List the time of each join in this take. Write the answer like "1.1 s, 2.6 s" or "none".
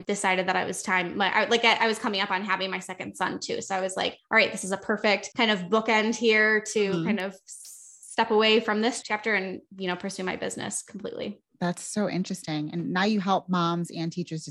none